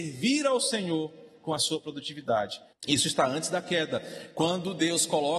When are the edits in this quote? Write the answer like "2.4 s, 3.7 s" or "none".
2.7 s